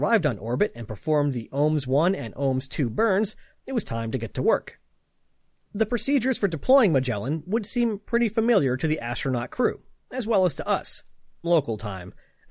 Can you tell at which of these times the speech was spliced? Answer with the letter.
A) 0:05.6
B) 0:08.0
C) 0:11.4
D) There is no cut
C